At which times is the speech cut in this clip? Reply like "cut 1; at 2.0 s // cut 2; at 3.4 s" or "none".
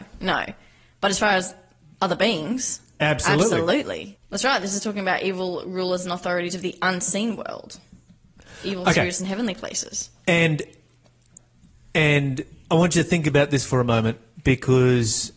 cut 1; at 4.2 s